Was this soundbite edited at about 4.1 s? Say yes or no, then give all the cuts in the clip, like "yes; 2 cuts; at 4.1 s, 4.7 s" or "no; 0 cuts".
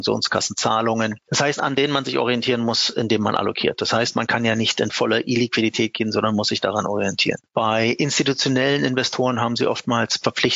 no; 2 cuts; at 1.6 s, 7.4 s